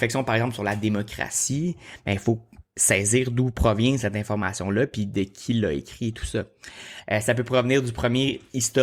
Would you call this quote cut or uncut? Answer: cut